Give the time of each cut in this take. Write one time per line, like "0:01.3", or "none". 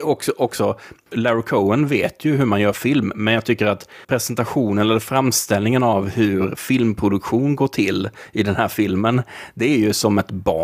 0:01.1
0:04.0